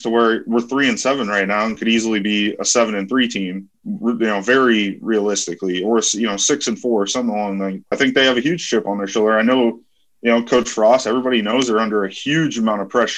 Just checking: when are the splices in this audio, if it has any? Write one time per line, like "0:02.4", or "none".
0:07.9